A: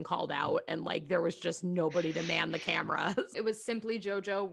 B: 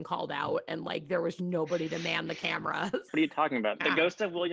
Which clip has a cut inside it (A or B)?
B